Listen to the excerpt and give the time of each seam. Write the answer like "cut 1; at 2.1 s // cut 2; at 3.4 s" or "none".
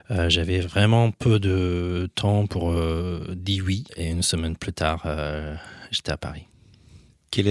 none